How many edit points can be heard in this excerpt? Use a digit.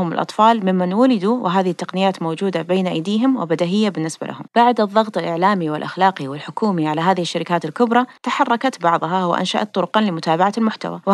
1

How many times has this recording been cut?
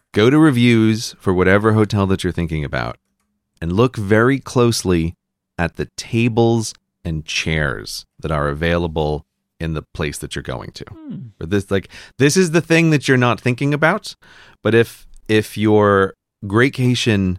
0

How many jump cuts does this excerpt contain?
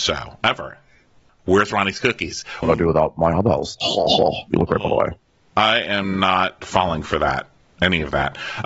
2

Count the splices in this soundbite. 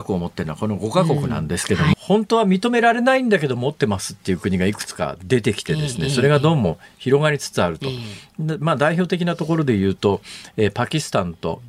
1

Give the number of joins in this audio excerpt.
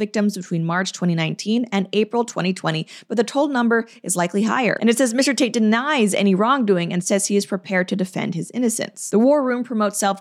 2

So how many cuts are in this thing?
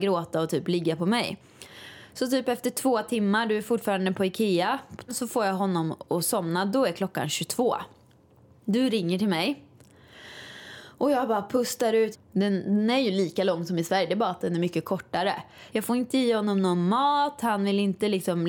3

